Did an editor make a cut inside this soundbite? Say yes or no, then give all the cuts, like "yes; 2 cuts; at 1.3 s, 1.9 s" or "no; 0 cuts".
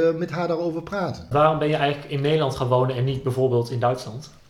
no; 0 cuts